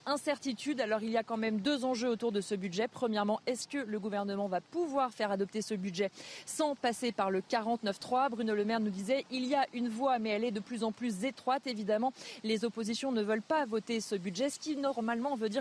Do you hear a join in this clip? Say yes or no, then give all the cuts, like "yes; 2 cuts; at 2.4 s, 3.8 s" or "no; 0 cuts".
no; 0 cuts